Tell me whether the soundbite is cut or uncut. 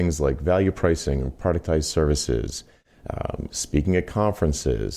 cut